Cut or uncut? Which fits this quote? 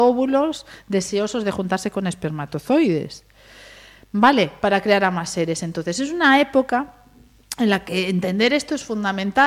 uncut